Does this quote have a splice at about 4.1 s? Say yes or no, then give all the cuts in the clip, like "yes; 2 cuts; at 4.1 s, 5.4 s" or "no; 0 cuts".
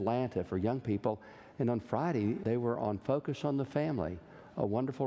no; 1 cut; at 2.4 s